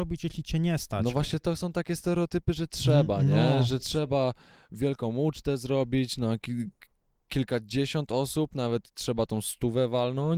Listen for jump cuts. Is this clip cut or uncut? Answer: uncut